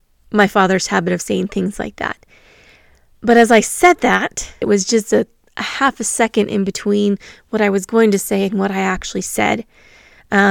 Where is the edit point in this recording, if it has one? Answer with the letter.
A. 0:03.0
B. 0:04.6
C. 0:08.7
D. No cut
B